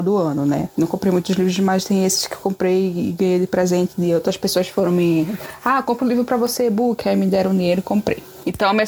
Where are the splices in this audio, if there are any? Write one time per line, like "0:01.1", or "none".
none